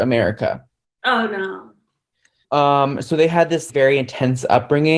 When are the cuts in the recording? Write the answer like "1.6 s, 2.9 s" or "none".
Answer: 2.4 s, 3.7 s